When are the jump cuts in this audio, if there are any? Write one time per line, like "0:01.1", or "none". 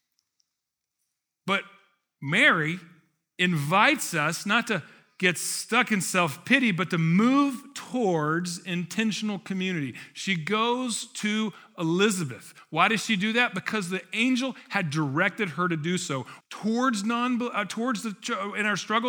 0:16.4